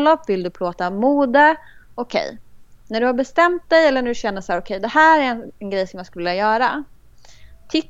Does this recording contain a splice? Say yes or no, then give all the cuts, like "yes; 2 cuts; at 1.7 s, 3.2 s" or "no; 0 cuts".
no; 0 cuts